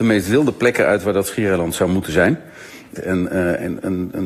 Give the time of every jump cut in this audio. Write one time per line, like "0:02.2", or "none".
0:03.0